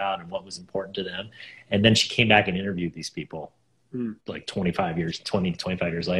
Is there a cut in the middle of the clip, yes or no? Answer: no